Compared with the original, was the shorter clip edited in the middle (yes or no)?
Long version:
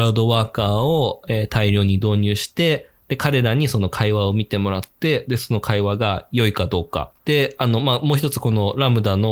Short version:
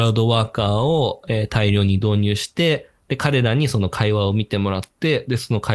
no